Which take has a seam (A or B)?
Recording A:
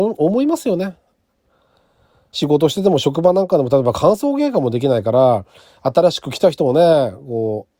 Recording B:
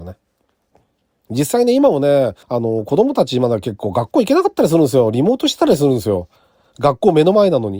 B